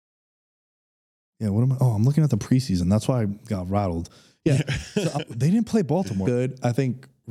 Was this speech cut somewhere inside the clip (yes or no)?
yes